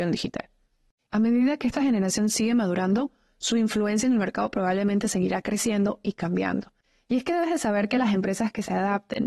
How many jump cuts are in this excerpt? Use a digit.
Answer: 1